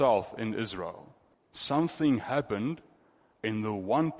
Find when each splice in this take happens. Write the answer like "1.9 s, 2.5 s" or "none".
1.3 s